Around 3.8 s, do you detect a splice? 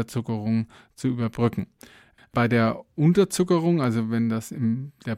no; 1 cut; at 2.2 s

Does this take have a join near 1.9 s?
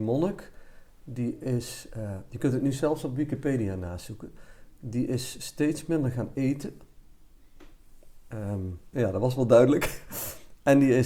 no; 1 cut; at 8.9 s

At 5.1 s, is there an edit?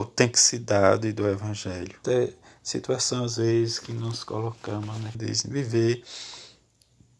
yes; 2 cuts; at 2.0 s, 5.1 s

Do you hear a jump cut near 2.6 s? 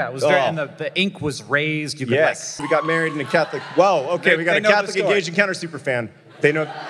yes; 1 cut; at 2.6 s

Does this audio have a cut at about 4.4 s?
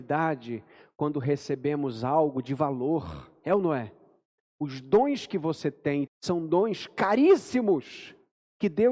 yes; 2 cuts; at 4.4 s, 6.1 s

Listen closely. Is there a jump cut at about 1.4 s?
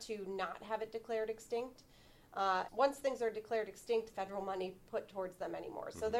no; 2 cuts; at 2.7 s, 4.1 s

